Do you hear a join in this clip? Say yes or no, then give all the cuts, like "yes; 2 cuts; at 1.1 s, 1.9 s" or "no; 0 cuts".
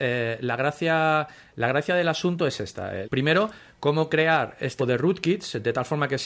yes; 2 cuts; at 3.0 s, 4.8 s